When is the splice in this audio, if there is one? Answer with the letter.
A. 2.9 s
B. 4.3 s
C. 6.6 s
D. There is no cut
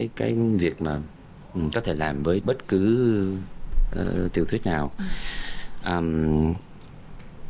D